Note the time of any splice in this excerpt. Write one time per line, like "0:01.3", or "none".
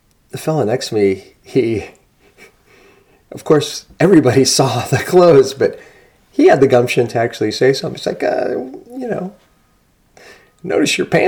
none